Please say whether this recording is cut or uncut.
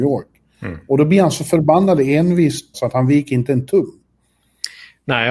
cut